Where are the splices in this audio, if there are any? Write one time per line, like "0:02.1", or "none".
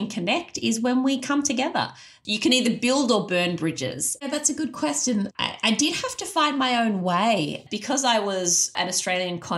0:04.2
0:05.3

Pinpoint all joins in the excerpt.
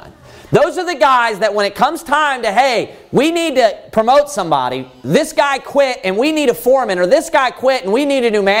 none

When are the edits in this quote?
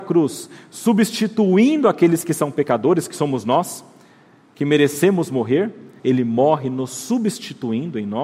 0:06.0

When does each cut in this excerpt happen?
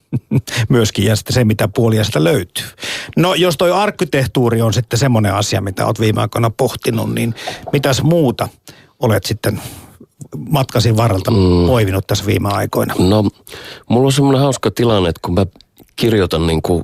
none

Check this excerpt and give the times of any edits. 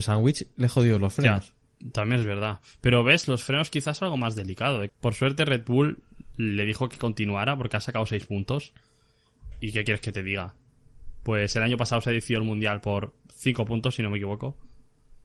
0:04.9

